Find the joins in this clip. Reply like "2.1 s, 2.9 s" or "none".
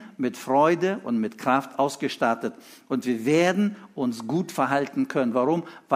none